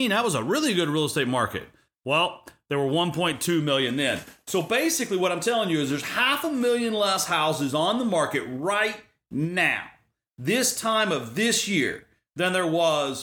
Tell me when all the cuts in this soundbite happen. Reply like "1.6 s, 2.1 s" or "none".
none